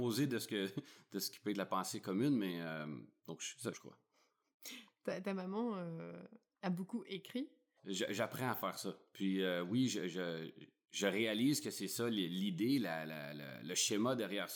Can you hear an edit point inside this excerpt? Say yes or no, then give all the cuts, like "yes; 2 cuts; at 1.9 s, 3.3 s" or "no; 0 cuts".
yes; 2 cuts; at 3.7 s, 7.8 s